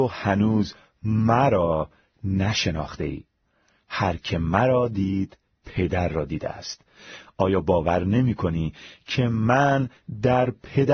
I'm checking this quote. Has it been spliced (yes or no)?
yes